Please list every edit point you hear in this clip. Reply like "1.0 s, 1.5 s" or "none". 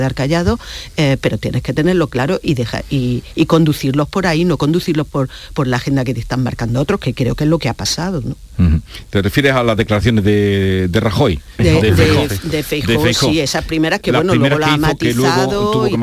11.6 s